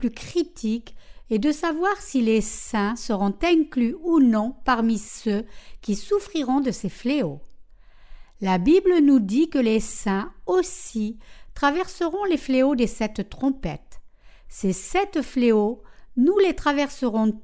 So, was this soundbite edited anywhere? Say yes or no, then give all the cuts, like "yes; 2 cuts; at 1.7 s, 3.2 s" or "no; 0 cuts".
no; 0 cuts